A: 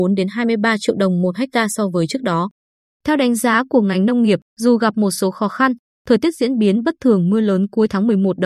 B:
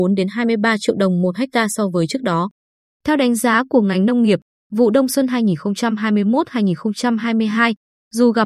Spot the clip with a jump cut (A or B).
A